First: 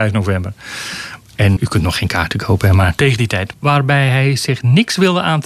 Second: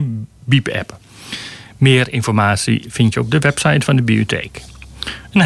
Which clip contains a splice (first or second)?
first